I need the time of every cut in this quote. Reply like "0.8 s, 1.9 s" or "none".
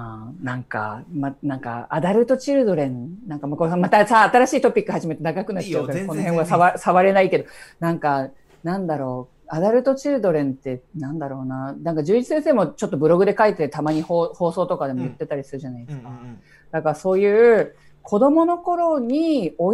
none

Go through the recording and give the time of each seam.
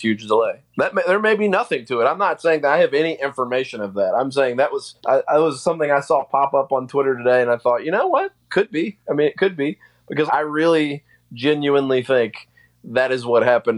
5.0 s, 10.3 s

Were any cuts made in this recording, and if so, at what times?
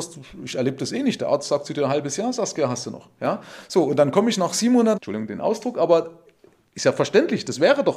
4.9 s

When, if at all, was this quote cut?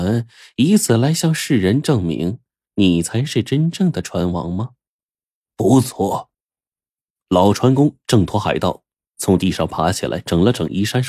none

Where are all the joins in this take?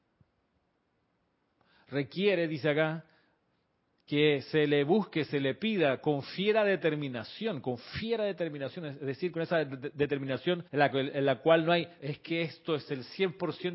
10.7 s, 12.0 s

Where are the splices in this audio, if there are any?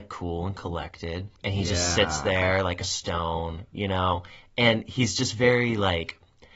1.3 s

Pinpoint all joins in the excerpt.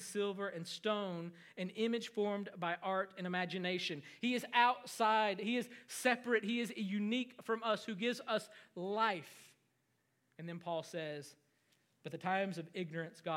4.2 s

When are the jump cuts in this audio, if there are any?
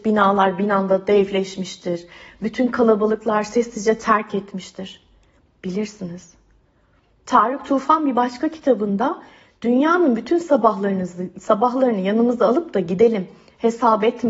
none

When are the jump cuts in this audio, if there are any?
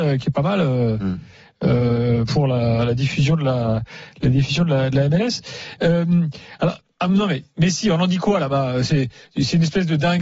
none

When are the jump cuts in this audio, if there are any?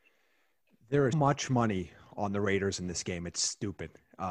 1.1 s

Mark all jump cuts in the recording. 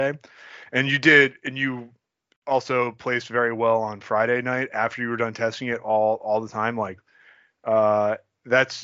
none

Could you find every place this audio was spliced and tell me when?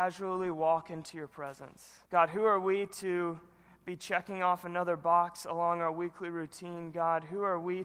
2.0 s

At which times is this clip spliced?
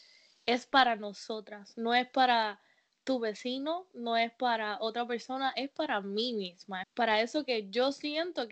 6.8 s

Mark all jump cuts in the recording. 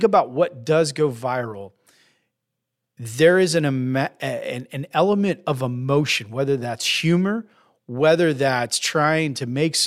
none

